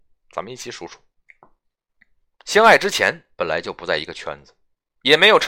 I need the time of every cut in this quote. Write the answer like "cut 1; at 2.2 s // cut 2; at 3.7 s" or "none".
cut 1; at 2.3 s